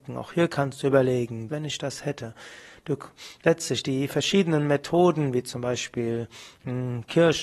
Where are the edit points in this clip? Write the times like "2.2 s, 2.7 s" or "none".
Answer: 1.5 s